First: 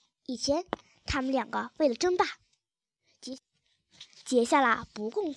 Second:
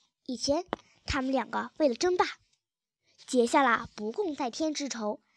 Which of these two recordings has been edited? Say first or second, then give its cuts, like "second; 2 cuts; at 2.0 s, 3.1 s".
second; 1 cut; at 3.2 s